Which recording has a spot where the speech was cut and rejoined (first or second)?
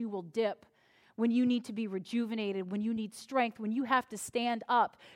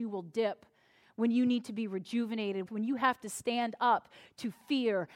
second